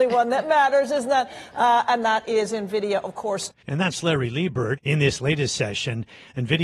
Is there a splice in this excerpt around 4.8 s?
yes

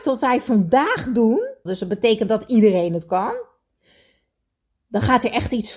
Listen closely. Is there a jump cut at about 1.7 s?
yes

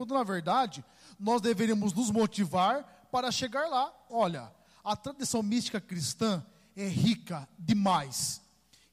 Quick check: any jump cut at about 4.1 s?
yes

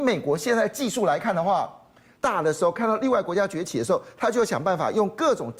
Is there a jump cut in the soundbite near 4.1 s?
no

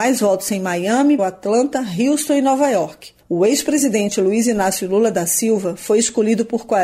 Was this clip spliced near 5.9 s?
no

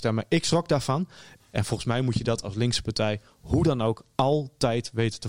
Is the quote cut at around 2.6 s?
no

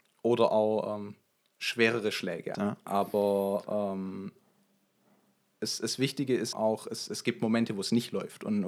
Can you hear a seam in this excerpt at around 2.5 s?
yes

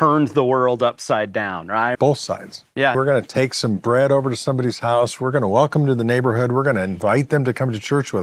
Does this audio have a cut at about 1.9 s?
yes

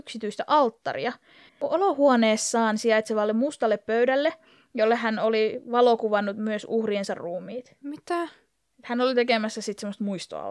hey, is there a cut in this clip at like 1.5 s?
yes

